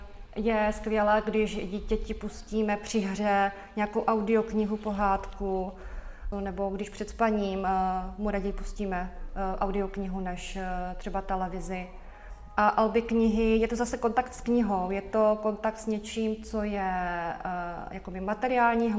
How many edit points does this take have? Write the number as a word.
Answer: one